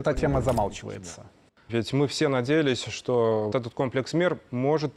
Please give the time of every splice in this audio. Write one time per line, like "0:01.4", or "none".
0:01.7
0:03.5